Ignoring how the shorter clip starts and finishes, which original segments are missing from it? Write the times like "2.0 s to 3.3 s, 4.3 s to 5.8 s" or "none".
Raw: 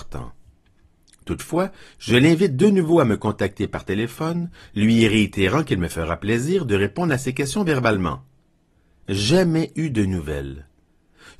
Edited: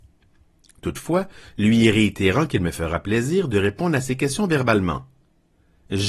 1.9 s to 4.6 s